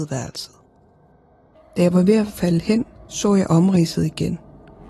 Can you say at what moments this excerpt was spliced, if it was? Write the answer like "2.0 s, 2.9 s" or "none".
1.6 s